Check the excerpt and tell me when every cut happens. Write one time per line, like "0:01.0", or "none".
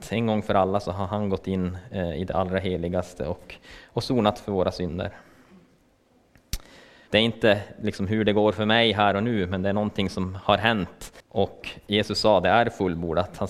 0:07.1
0:11.2

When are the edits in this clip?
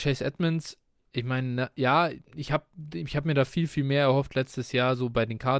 none

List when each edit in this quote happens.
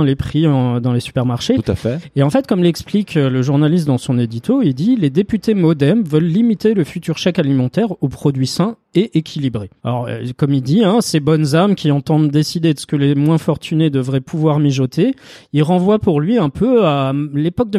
0:09.8

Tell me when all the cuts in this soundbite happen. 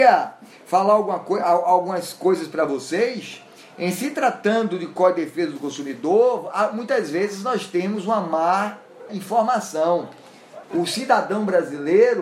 0:09.1
0:10.6

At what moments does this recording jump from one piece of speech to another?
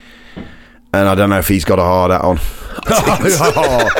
0:02.8

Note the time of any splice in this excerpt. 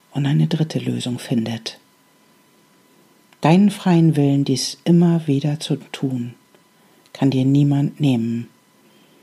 none

